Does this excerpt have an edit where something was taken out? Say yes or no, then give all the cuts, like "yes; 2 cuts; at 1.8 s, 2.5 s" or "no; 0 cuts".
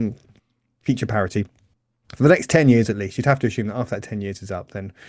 no; 0 cuts